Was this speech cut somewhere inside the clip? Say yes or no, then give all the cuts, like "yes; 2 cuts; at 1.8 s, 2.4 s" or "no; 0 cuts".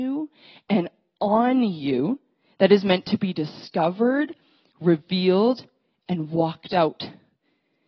no; 0 cuts